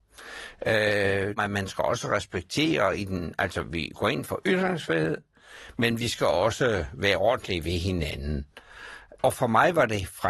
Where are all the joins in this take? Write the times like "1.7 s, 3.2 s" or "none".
1.4 s